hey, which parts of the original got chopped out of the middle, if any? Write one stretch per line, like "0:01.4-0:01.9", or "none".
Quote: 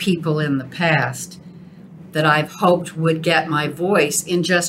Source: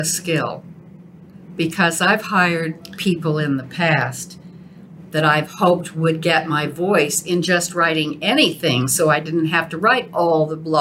none